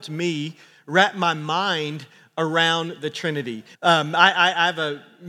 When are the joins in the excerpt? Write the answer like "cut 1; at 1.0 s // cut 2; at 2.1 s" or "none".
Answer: cut 1; at 3.7 s